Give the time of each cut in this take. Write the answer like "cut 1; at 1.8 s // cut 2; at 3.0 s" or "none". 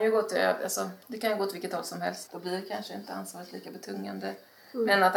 cut 1; at 1.0 s // cut 2; at 2.3 s